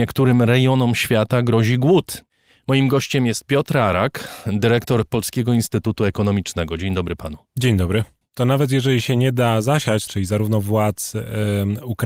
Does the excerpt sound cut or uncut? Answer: cut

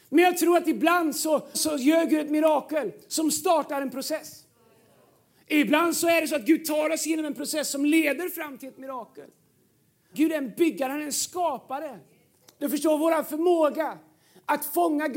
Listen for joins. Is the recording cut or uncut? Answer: cut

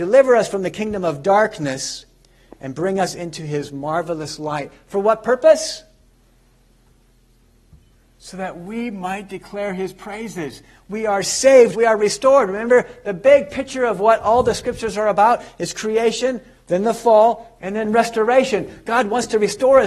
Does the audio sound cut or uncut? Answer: cut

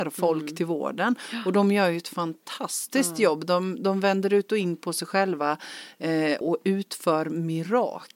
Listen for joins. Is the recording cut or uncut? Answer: cut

